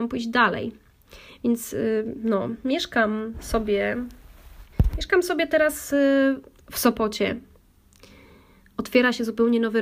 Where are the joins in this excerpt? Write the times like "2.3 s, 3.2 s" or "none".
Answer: none

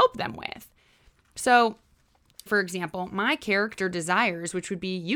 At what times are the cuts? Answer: 2.5 s

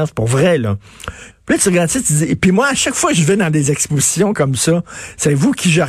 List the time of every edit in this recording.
1.3 s

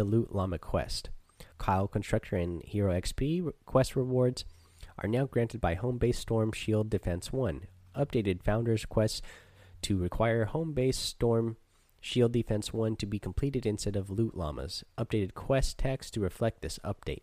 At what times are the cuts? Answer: 1.5 s

